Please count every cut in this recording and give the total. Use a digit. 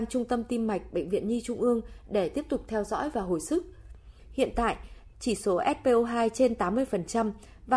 1